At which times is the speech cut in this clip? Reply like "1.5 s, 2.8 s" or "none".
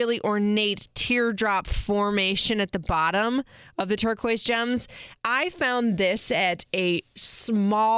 none